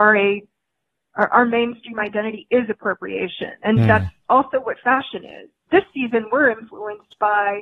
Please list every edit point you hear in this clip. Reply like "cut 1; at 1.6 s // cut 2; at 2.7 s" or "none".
none